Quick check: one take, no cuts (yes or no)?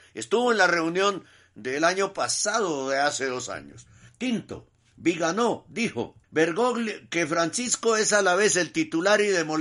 no